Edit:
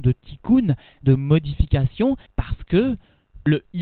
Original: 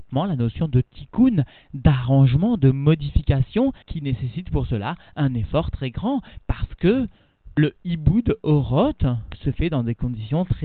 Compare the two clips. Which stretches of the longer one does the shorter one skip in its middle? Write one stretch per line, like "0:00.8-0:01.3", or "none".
0:01.7-0:02.6
0:03.8-0:06.4